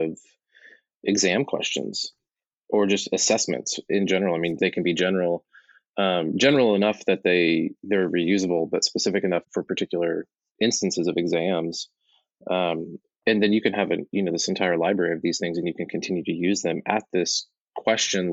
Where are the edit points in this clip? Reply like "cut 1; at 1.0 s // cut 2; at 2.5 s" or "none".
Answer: cut 1; at 4.6 s // cut 2; at 9.4 s

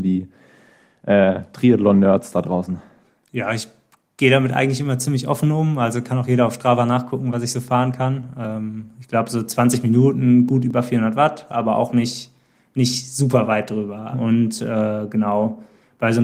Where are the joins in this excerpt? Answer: cut 1; at 14.1 s

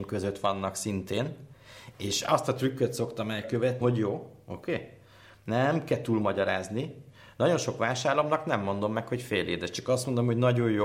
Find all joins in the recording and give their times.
cut 1; at 3.8 s

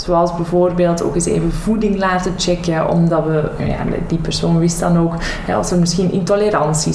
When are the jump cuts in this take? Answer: none

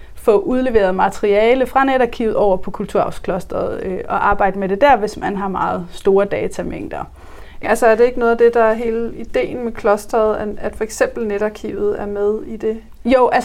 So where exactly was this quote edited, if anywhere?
cut 1; at 7.6 s

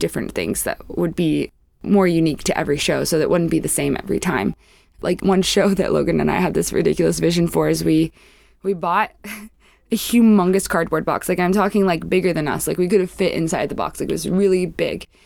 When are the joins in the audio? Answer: none

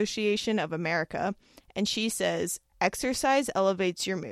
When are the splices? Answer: none

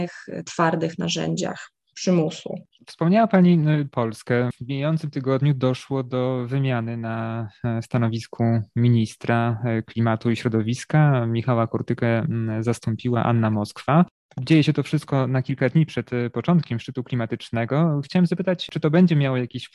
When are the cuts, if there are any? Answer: none

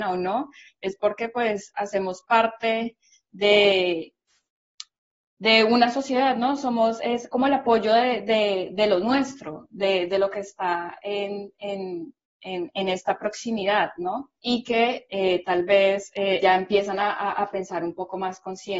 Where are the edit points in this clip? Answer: cut 1; at 14.4 s // cut 2; at 16.4 s

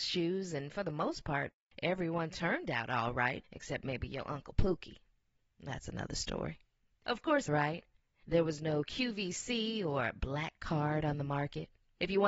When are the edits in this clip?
cut 1; at 7.5 s

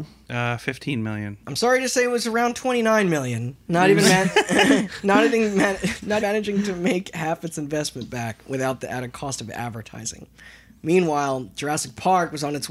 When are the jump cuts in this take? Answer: cut 1; at 3.7 s // cut 2; at 6.2 s

